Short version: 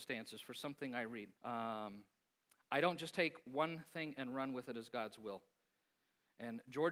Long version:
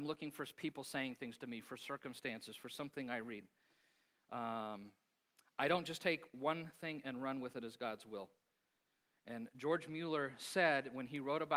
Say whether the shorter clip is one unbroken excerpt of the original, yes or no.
no